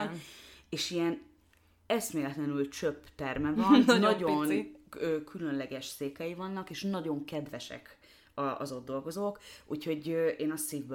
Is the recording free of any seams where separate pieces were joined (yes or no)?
yes